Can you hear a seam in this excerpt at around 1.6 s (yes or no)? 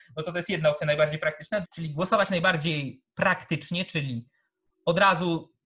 yes